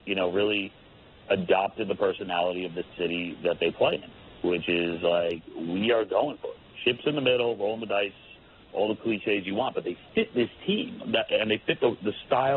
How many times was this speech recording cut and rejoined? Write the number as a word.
zero